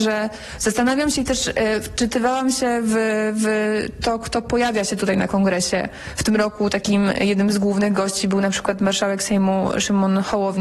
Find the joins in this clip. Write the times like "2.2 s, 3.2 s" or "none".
none